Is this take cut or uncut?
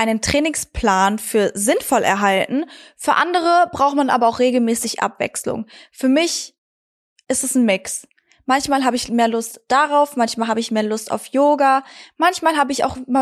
uncut